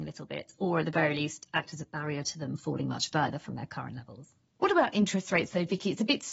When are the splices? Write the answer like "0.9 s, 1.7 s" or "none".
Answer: none